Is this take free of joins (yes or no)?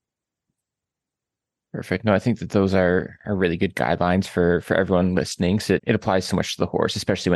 no